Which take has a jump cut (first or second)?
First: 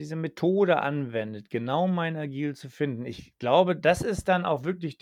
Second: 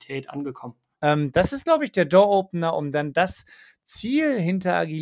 second